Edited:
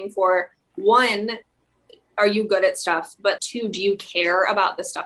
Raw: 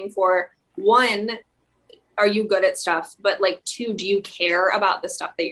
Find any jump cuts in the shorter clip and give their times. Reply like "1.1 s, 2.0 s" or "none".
3.4 s